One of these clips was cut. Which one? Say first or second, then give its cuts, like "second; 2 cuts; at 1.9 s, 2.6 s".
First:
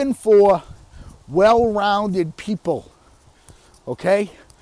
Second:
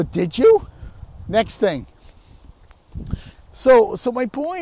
second; 2 cuts; at 1.2 s, 3.4 s